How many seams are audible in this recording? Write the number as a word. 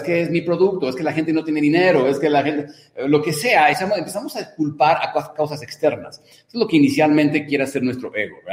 zero